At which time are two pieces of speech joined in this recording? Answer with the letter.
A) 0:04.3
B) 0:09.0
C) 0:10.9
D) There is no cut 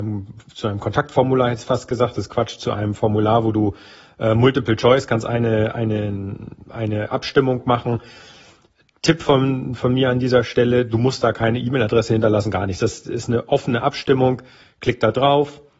D